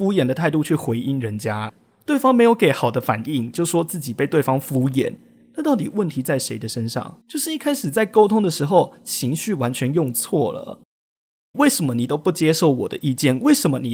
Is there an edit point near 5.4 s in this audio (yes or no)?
no